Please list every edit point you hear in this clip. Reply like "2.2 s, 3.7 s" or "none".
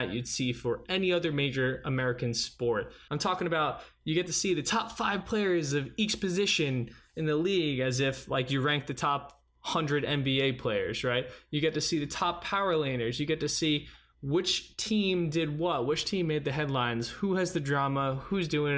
3.1 s